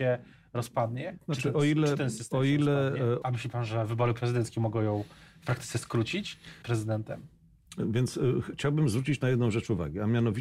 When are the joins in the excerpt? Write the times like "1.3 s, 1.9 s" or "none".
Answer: 3.2 s, 6.6 s